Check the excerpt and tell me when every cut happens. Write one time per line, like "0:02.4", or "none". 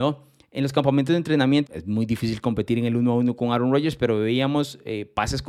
0:01.7